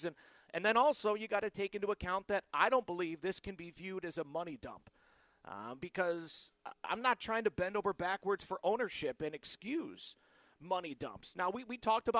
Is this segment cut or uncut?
uncut